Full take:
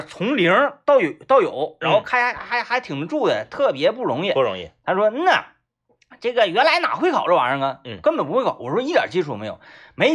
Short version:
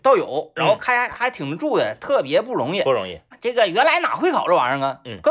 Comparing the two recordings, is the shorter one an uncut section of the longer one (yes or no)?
no